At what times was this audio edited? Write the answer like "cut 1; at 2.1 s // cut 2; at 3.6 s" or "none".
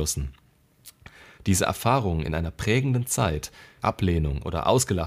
cut 1; at 1.4 s // cut 2; at 3.8 s

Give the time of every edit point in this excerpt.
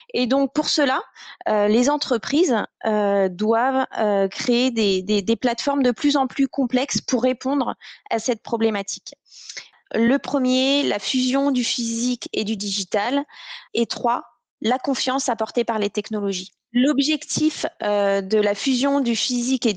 cut 1; at 9.9 s // cut 2; at 13.7 s

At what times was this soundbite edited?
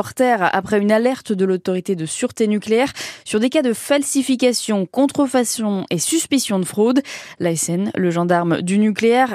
none

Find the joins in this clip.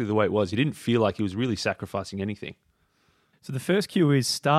none

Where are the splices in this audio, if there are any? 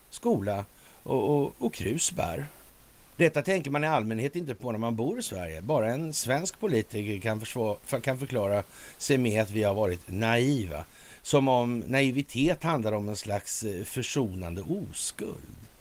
cut 1; at 3.1 s

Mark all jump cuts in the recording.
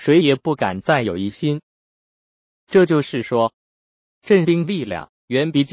none

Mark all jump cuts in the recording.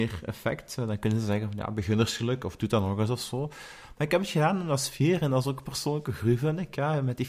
none

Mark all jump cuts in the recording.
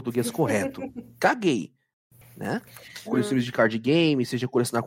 cut 1; at 3.1 s

